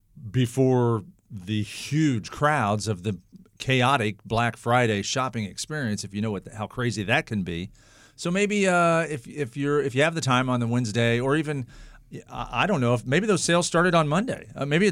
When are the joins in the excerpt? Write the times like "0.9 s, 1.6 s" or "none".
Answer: none

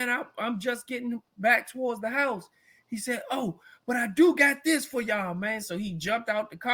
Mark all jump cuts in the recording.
none

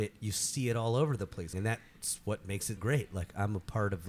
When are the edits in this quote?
1.5 s, 2.8 s

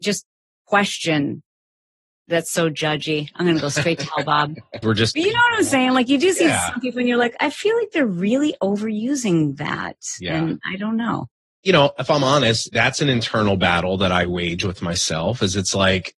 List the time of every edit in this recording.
4.8 s

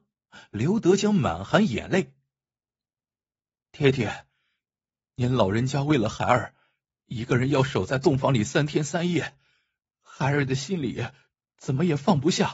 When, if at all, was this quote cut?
none

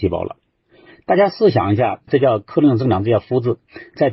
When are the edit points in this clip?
2.1 s

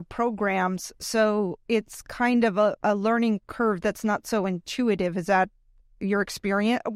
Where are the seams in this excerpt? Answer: 2.8 s

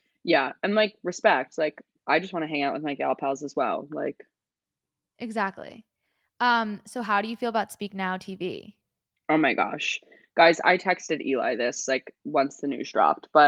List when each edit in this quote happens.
none

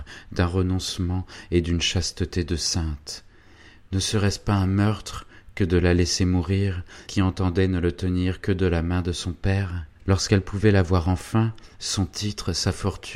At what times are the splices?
7.1 s, 10.0 s, 11.7 s

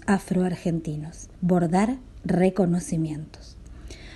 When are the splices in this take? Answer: 1.3 s

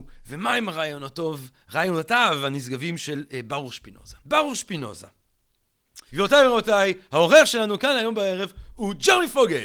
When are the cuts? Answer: 4.2 s, 6.1 s

